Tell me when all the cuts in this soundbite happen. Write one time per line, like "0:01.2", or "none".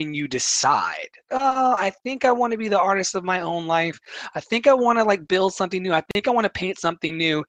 0:01.3

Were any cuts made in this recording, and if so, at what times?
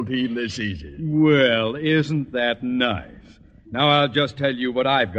none

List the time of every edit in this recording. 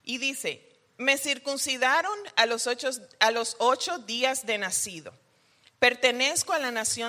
none

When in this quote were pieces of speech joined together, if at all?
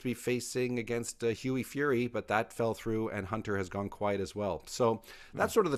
none

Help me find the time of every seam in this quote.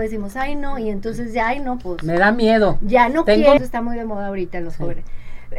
0:03.6

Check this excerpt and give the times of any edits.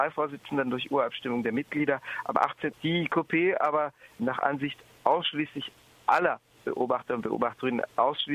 0:02.7
0:04.2

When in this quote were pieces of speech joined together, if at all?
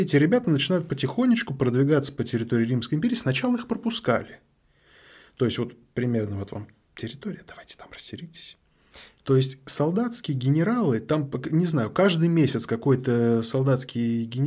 0:09.2

